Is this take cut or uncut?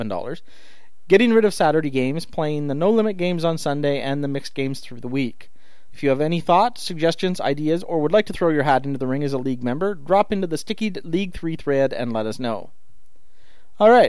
cut